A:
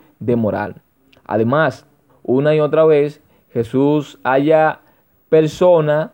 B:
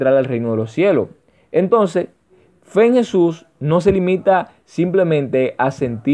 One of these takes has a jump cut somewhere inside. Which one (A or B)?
A